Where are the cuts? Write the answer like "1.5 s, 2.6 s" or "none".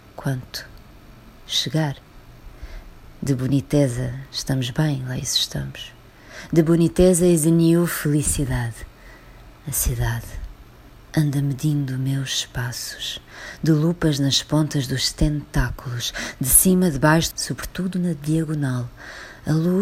9.6 s, 17.3 s